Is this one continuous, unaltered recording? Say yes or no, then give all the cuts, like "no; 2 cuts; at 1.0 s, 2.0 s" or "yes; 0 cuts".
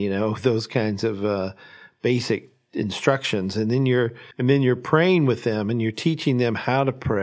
no; 1 cut; at 4.3 s